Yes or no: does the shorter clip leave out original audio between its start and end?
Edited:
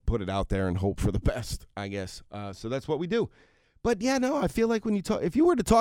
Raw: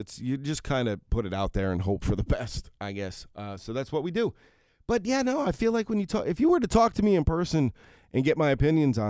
no